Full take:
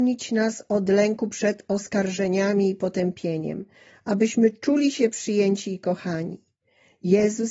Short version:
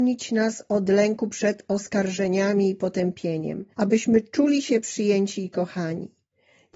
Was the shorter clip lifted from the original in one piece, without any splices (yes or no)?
no